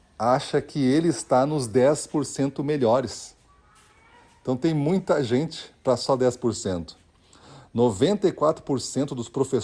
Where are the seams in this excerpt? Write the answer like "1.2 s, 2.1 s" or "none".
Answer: none

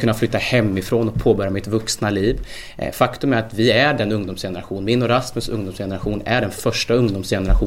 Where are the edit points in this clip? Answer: none

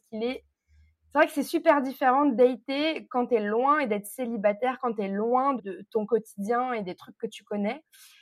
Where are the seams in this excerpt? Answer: 5.6 s

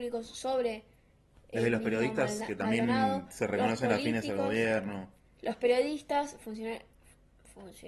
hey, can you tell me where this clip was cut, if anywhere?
none

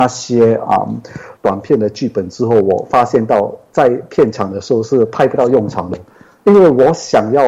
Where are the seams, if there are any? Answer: 1.4 s

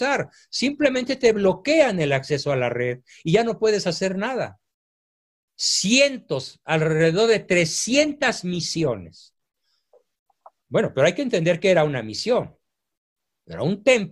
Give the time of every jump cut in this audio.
5.4 s

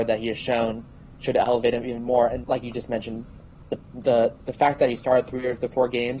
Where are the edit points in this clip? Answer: 2.4 s

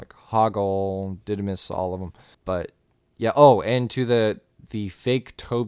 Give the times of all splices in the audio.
none

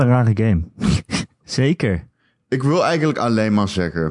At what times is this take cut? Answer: 1.4 s

